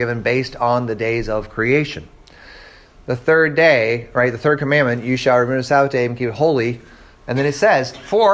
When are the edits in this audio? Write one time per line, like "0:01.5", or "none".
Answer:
none